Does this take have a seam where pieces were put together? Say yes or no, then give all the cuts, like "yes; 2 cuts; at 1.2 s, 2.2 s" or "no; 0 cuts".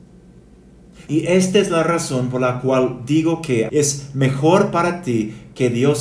yes; 2 cuts; at 1.1 s, 3.7 s